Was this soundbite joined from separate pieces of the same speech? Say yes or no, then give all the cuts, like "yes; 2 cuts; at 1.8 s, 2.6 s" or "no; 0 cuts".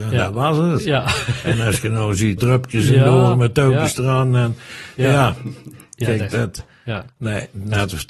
yes; 1 cut; at 2.4 s